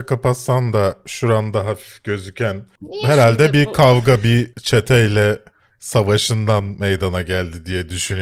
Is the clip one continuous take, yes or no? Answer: no